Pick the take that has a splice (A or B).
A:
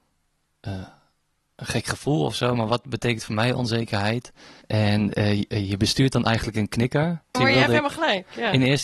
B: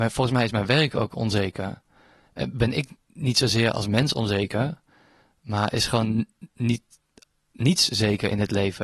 A